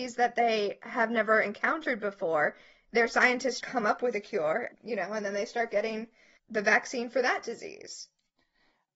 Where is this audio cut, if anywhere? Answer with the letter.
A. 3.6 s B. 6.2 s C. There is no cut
A